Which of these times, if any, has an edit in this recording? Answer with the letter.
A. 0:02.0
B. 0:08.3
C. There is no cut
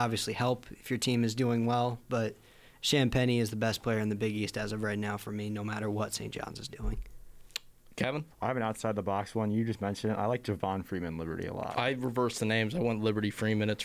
B